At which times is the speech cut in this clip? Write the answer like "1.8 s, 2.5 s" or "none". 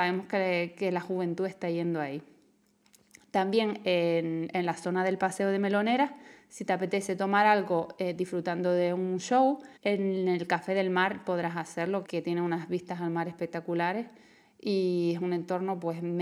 9.8 s, 12.0 s